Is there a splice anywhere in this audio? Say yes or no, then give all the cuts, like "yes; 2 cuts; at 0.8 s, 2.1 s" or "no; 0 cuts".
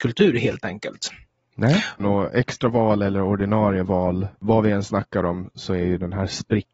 yes; 2 cuts; at 2.0 s, 4.3 s